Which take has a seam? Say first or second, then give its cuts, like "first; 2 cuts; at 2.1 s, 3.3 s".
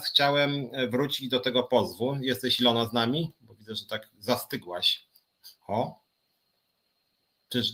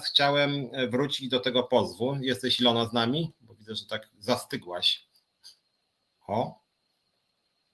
first; 1 cut; at 5.6 s